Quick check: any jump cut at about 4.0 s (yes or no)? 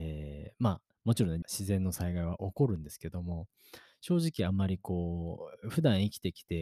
no